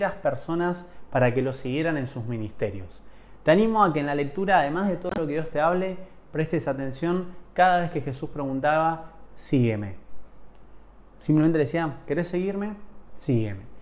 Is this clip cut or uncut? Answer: uncut